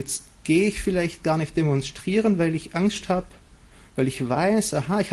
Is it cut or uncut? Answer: uncut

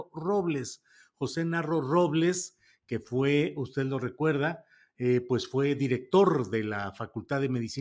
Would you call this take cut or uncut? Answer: uncut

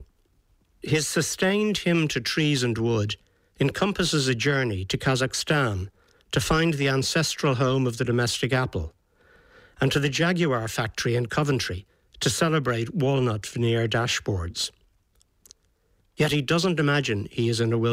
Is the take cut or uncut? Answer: cut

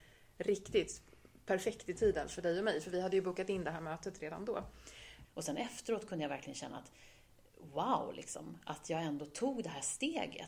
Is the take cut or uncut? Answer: cut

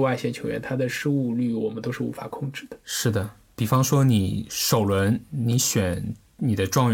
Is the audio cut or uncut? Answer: uncut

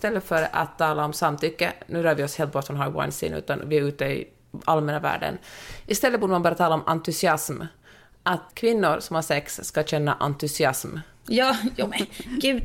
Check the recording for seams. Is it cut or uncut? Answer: cut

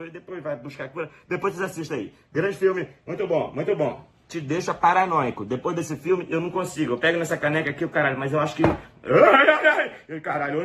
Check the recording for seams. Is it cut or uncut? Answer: uncut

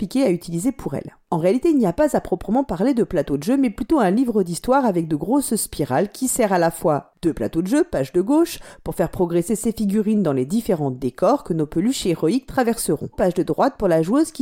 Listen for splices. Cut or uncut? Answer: cut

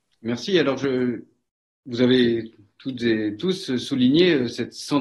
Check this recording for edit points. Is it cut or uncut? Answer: uncut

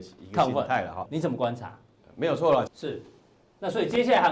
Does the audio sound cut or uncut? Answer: cut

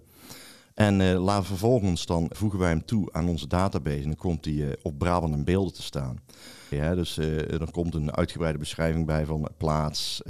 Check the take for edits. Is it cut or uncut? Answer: cut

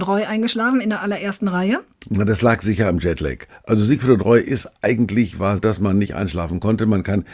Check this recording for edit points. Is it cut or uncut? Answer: cut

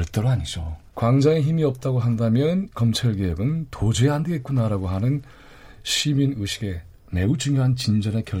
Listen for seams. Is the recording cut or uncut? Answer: cut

